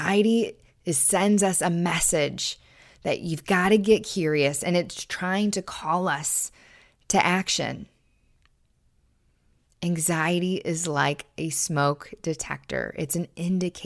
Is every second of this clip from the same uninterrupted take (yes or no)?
yes